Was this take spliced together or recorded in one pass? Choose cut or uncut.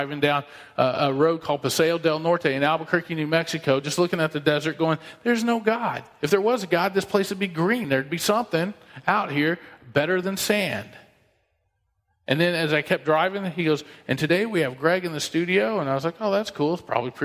uncut